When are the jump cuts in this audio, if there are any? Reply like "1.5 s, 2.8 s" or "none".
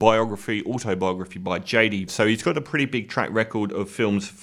2.1 s